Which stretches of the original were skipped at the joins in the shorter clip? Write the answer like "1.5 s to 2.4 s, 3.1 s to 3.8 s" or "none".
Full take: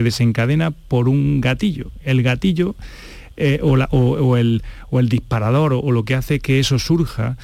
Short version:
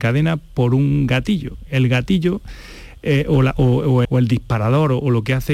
4.4 s to 4.9 s